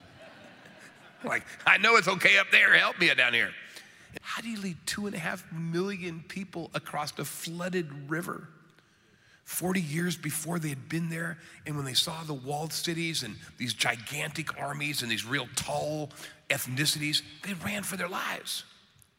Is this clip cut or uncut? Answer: cut